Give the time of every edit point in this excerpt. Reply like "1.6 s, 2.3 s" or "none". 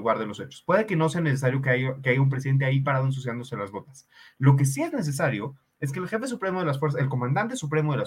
none

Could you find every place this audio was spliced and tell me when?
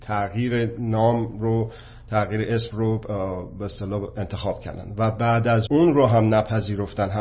5.7 s

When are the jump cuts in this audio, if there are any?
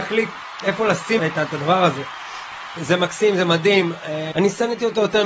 1.2 s, 2.8 s, 4.3 s

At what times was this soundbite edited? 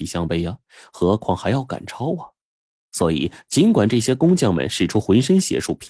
none

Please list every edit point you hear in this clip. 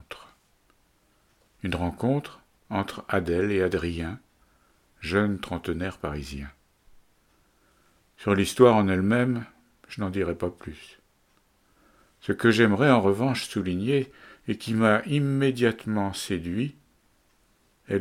none

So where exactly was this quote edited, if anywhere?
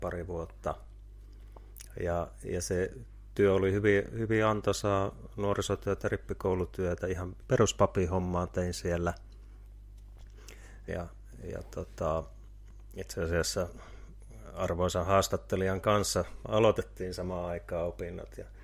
7.4 s, 10.9 s

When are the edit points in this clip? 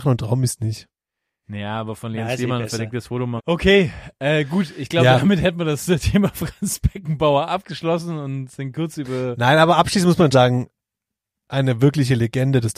3.4 s, 10.3 s

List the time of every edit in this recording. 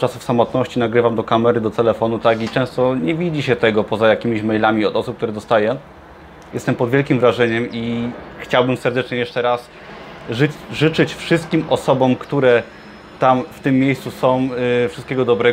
6.5 s

